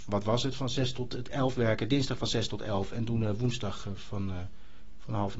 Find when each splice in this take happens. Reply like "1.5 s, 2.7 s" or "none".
none